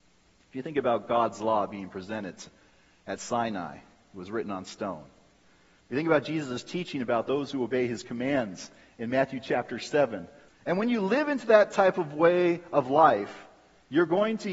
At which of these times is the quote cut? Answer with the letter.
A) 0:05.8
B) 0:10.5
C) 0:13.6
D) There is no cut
B